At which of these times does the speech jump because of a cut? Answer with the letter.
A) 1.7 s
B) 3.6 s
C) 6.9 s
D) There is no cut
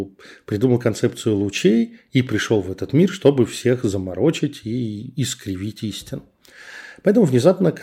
D